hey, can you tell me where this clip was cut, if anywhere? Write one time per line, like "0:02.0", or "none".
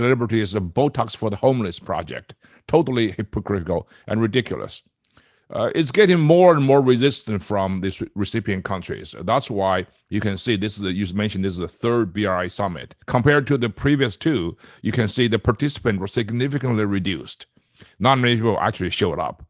0:13.0